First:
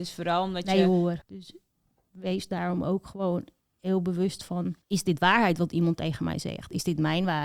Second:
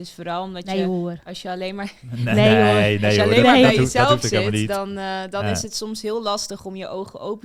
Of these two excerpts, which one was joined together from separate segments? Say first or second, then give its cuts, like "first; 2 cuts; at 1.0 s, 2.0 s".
first; 2 cuts; at 1.2 s, 4.8 s